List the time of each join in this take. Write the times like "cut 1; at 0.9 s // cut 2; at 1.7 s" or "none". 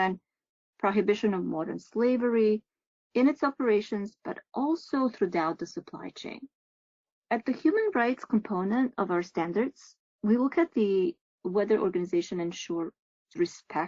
cut 1; at 7.2 s